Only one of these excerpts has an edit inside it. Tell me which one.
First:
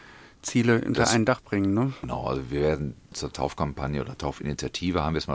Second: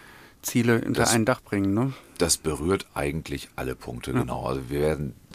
first; 1 cut; at 2.0 s

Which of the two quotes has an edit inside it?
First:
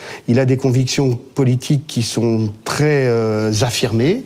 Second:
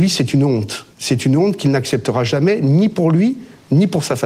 second; 1 cut; at 0.9 s

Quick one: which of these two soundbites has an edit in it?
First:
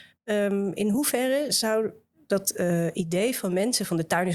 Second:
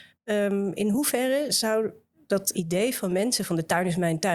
second; 1 cut; at 2.5 s

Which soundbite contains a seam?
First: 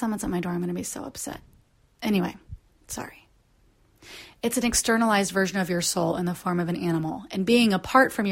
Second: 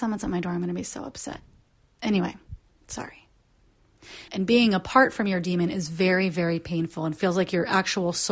second; 1 cut; at 4.3 s

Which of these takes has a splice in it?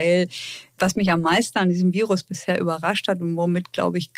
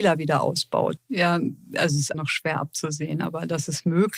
second; 2 cuts; at 1.0 s, 2.1 s

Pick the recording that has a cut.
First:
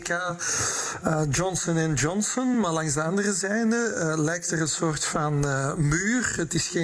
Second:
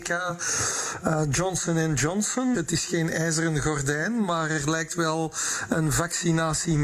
second; 1 cut; at 2.5 s

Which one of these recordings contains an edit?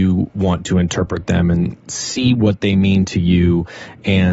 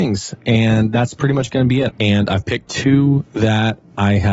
second; 1 cut; at 1.9 s

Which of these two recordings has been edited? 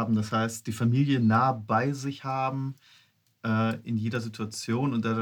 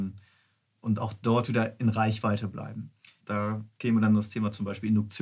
second; 1 cut; at 3.2 s

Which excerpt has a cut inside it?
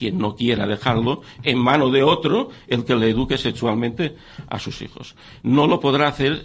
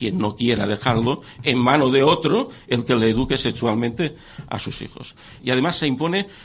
second; 1 cut; at 5.4 s

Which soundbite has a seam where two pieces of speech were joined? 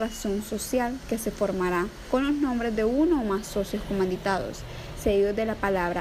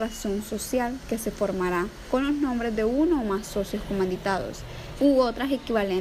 second; 1 cut; at 5.0 s

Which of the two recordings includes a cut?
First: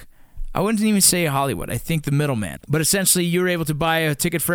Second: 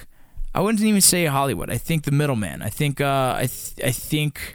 first; 1 cut; at 2.6 s

